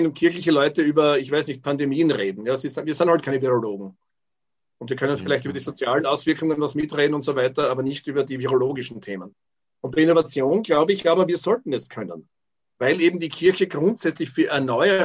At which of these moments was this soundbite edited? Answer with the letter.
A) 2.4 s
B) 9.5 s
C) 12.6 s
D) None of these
D